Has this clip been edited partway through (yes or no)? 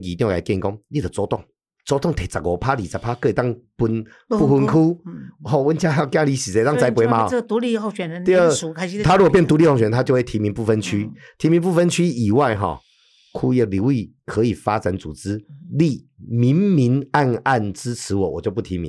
no